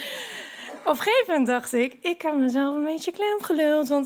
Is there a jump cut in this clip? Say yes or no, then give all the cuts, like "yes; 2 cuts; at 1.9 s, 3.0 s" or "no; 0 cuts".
no; 0 cuts